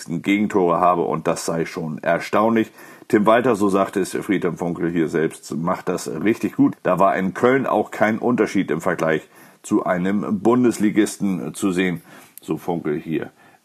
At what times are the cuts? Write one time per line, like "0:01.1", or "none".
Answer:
0:06.7